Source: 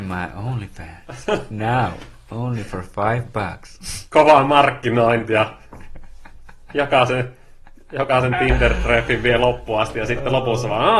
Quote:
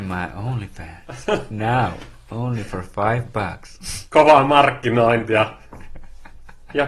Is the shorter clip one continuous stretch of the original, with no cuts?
yes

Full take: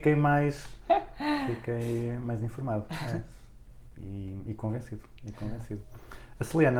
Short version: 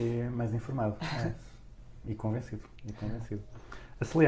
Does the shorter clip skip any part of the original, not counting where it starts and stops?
yes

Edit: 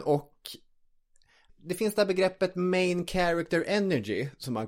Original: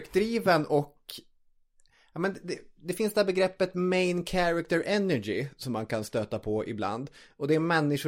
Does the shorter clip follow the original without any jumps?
no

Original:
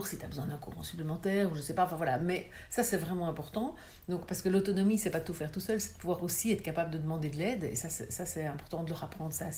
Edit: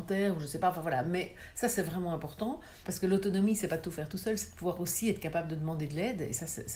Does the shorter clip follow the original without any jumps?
no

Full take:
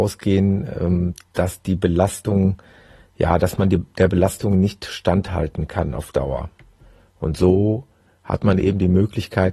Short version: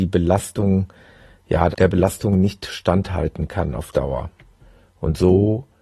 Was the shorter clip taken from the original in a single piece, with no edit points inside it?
no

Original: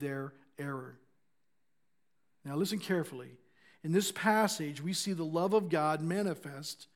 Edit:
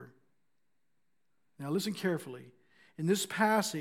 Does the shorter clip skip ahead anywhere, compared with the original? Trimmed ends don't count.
no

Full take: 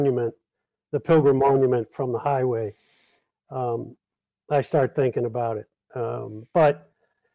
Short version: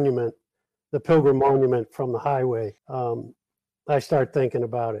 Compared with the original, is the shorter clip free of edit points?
no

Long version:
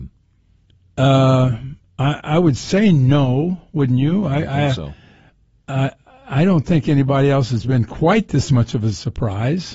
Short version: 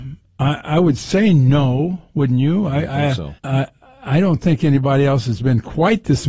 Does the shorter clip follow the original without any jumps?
no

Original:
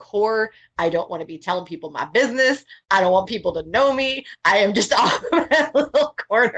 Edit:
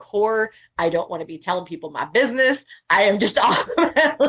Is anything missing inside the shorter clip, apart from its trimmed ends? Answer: yes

